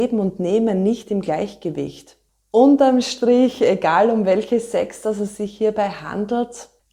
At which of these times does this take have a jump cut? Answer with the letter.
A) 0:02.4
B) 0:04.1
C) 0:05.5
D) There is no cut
D